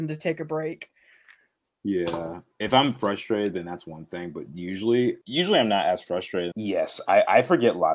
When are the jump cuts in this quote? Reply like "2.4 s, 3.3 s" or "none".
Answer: 5.2 s, 6.5 s